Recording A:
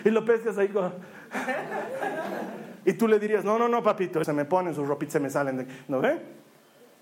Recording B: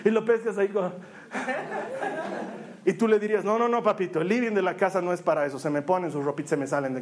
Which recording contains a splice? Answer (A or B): A